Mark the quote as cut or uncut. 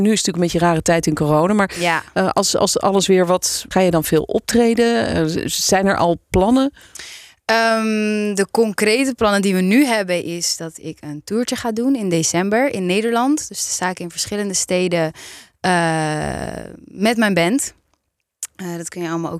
cut